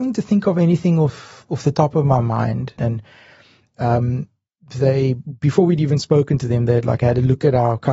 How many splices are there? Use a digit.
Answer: 1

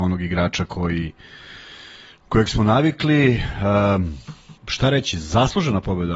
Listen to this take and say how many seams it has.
1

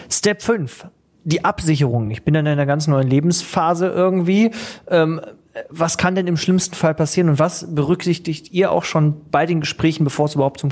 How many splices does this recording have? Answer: 0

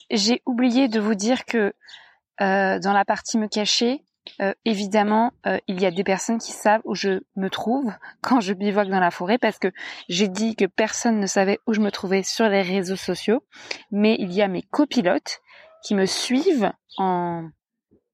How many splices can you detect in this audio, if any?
0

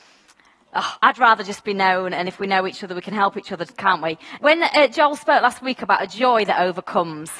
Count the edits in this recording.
1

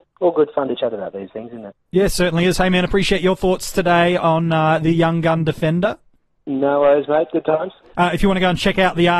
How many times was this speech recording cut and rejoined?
0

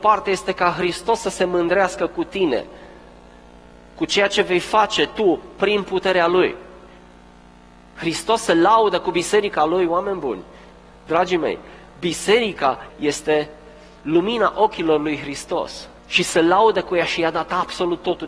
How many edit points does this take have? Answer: 2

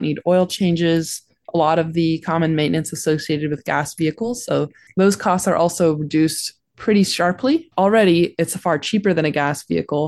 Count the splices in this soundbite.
2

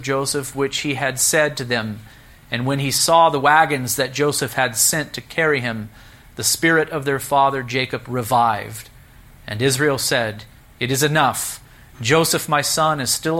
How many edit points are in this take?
0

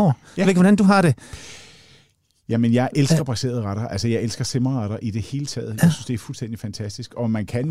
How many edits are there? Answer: 0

